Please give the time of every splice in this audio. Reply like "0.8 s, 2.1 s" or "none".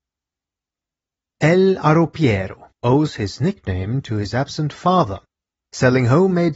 2.8 s